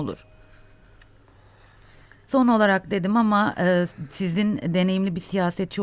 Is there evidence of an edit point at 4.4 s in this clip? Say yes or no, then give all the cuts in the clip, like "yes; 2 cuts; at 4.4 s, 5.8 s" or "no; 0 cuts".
no; 1 cut; at 2.3 s